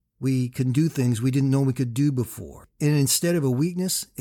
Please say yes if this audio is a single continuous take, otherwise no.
yes